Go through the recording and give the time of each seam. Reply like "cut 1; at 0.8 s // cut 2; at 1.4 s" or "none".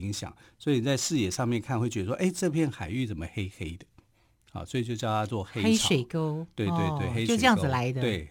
none